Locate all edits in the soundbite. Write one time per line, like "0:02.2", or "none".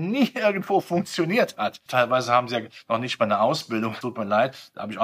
0:01.9
0:04.0